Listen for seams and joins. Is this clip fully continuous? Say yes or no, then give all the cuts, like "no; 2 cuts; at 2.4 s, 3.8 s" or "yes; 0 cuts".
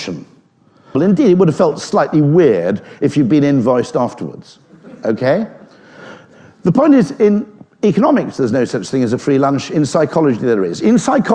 no; 1 cut; at 0.9 s